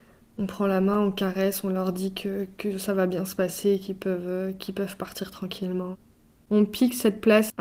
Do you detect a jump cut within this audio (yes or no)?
no